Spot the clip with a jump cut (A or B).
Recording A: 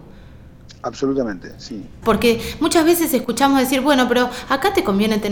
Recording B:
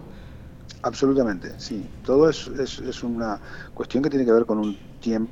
A